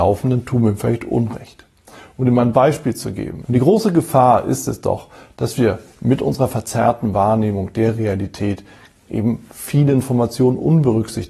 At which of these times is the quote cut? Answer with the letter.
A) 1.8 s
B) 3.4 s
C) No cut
B